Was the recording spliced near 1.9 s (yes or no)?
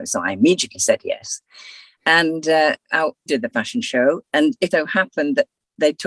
no